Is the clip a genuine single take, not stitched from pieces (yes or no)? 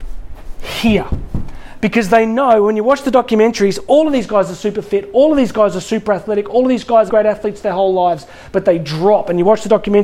no